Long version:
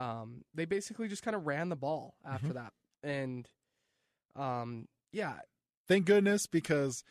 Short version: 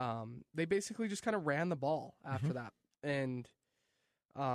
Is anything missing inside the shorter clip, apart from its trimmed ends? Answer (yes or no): no